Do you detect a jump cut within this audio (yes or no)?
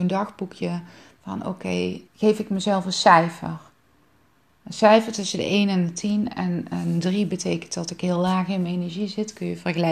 yes